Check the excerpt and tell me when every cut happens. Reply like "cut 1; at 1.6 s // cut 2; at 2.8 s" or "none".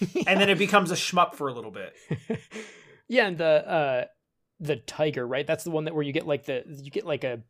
none